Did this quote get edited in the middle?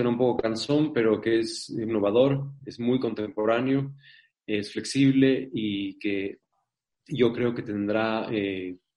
yes; 1 cut; at 1.9 s

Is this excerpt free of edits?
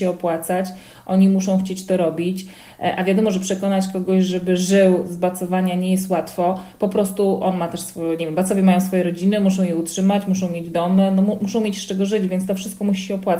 yes; 0 cuts

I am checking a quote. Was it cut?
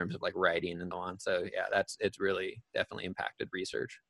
yes; 1 cut; at 0.9 s

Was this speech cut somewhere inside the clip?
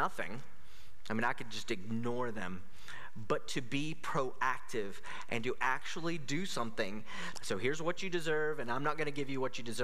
yes; 1 cut; at 7.3 s

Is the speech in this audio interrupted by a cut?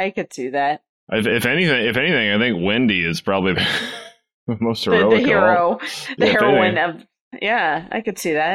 no; 0 cuts

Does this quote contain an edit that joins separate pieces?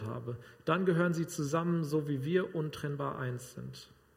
no; 0 cuts

